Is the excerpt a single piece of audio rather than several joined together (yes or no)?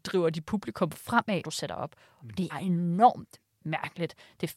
no